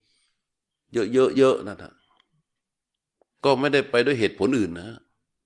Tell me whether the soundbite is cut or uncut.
cut